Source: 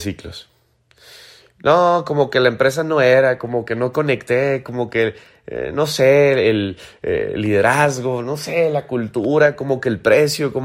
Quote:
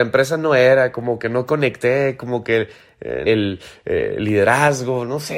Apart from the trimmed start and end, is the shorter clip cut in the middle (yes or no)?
yes